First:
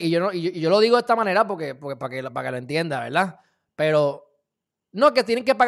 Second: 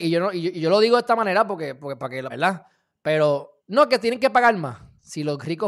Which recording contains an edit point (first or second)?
second